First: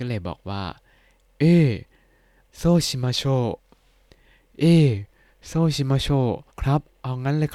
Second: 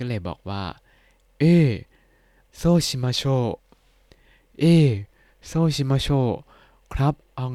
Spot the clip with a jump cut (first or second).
first